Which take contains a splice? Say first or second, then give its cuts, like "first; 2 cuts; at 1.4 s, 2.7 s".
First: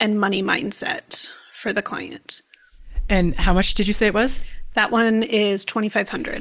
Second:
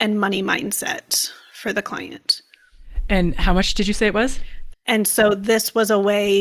second; 1 cut; at 4.7 s